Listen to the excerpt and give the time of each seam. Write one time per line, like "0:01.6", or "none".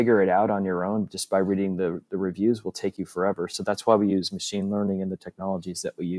none